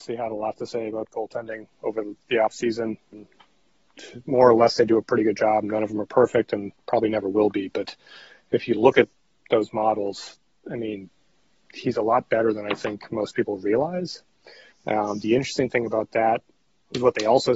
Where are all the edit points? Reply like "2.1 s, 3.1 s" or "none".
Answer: 3.1 s, 14.7 s